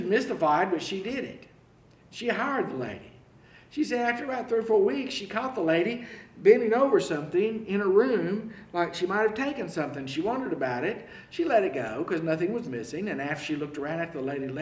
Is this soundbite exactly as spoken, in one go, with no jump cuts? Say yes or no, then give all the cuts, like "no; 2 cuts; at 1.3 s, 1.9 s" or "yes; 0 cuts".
yes; 0 cuts